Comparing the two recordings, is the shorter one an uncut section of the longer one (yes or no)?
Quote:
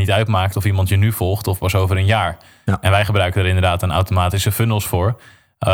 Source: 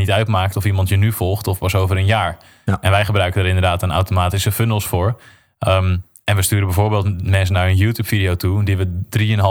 yes